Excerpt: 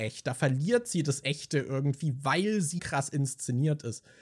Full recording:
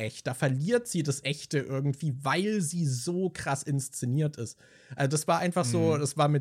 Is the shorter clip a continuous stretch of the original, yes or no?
no